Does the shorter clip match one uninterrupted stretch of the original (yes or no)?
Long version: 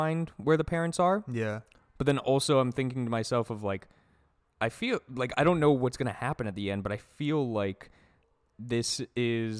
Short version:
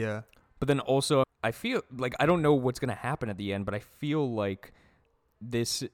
no